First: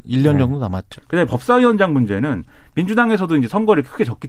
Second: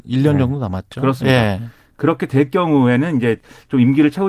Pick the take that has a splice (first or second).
first